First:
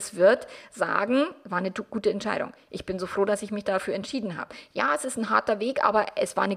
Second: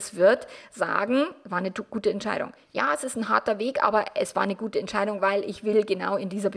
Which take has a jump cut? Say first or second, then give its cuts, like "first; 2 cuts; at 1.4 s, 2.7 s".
second; 1 cut; at 2.7 s